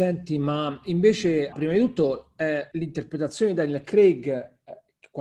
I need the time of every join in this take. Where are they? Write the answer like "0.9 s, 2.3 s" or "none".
1.5 s, 2.7 s